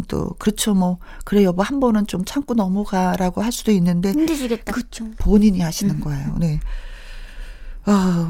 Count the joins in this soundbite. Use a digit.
1